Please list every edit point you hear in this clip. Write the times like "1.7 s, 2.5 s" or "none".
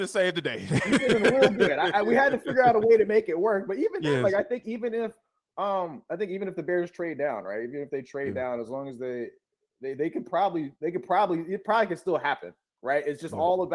10.7 s